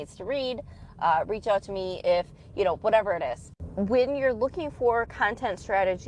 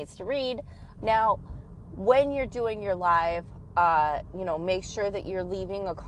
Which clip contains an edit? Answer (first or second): second